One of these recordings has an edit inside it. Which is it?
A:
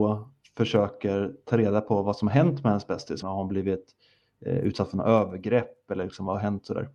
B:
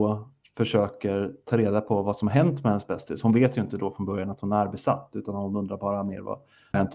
A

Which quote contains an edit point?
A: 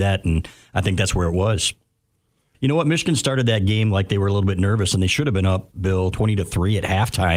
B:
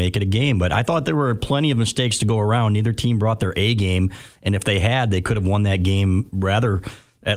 A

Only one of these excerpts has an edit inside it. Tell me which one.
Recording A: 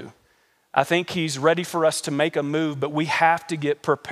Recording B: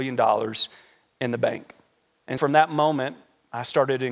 B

